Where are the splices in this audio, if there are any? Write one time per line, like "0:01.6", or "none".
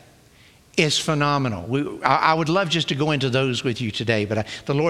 none